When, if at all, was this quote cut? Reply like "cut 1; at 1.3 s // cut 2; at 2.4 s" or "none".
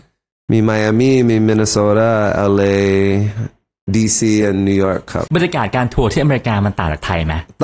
cut 1; at 5.3 s